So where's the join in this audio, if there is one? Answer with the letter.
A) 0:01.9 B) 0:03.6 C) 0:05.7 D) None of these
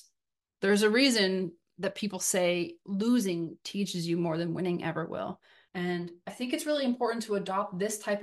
C